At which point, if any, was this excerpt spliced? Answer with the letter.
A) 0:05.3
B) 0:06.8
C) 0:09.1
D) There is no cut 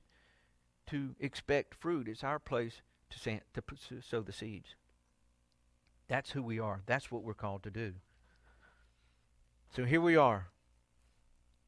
D